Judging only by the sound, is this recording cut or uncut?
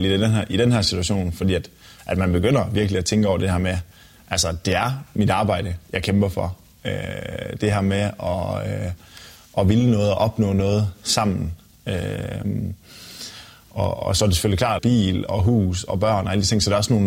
cut